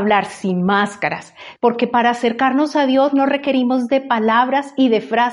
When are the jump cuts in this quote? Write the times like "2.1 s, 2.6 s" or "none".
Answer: 1.6 s